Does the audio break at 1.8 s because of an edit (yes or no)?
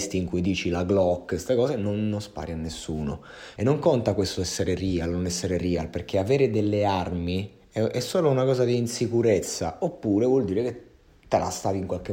no